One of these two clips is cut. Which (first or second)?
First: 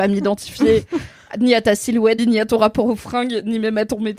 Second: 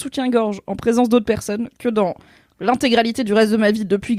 first